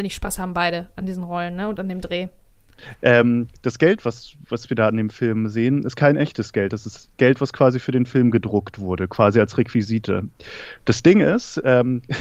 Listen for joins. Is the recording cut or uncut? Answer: cut